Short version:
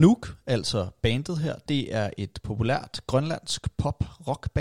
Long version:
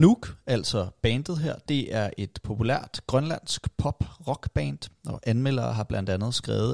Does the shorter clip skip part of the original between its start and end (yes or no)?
no